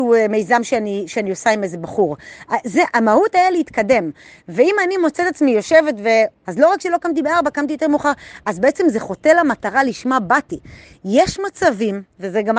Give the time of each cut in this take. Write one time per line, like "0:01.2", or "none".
0:06.4